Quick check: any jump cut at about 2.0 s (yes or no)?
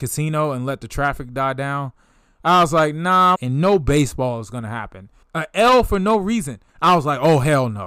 no